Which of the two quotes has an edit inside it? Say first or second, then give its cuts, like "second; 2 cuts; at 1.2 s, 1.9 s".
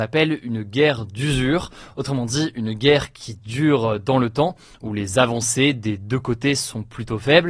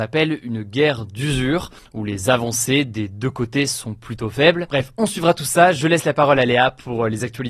second; 2 cuts; at 1.8 s, 4.7 s